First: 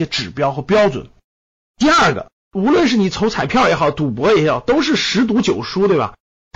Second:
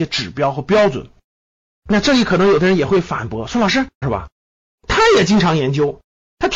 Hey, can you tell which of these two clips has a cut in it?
second; 2 cuts; at 1.7 s, 4.0 s

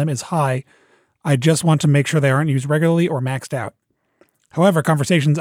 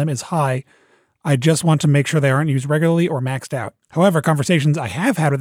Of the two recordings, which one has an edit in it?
second; 1 cut; at 3.8 s

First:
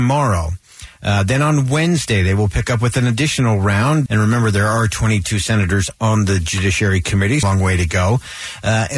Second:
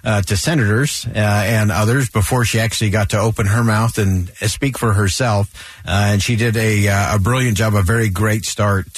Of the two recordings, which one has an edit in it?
first; 2 cuts; at 4.1 s, 7.4 s

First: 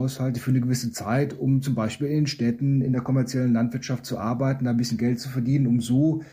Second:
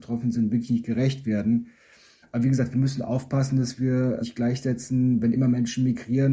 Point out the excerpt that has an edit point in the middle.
second; 2 cuts; at 2.2 s, 4.2 s

